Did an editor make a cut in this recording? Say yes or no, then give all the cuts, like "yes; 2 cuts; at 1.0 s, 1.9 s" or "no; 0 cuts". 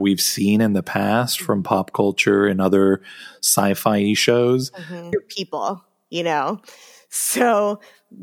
yes; 1 cut; at 5.1 s